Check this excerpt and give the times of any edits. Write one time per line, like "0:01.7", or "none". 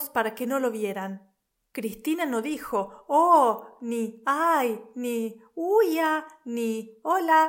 none